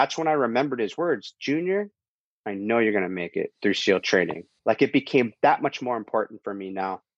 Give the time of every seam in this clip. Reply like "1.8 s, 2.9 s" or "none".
4.6 s